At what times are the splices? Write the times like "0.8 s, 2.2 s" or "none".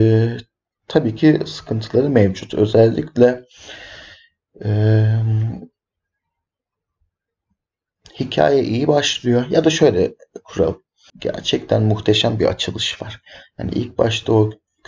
11.1 s